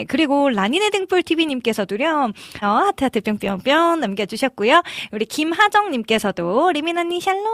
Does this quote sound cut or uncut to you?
cut